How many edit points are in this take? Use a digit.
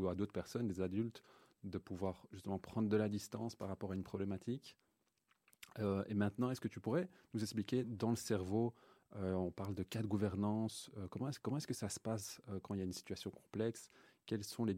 0